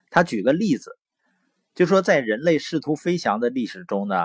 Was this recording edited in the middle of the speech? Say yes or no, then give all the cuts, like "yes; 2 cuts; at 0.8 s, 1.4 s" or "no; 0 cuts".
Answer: no; 0 cuts